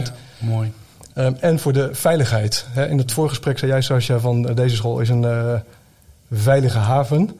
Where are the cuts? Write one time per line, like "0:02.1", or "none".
none